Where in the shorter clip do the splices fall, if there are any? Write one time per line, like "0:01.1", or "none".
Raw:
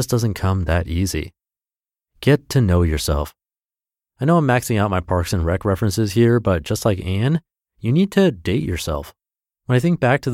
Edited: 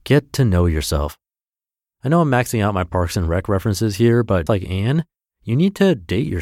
0:04.5